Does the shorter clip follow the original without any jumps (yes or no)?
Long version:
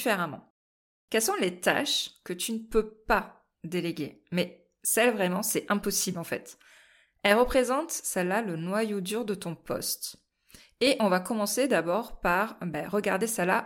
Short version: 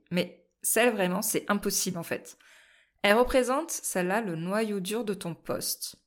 yes